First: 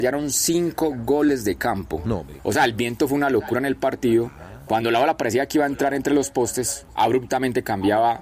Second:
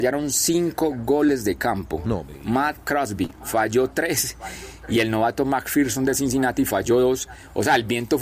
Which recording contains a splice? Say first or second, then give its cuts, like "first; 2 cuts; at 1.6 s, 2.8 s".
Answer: first; 1 cut; at 2.4 s